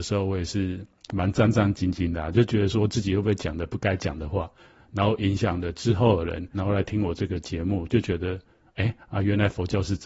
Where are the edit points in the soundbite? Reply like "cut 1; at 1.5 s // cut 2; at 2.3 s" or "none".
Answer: cut 1; at 6.5 s

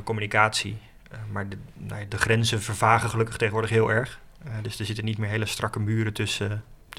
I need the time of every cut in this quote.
cut 1; at 2.1 s

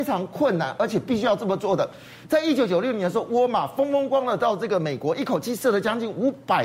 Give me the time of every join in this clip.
cut 1; at 4.1 s

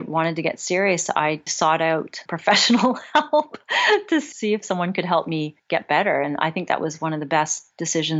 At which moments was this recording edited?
none

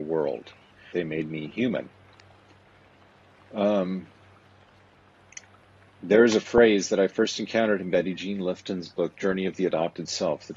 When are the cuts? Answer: cut 1; at 0.9 s

